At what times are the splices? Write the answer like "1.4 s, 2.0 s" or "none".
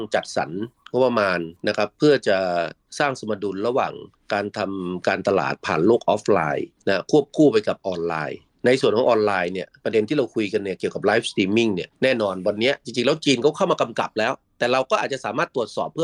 none